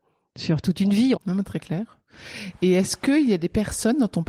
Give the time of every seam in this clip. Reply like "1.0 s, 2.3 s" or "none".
1.2 s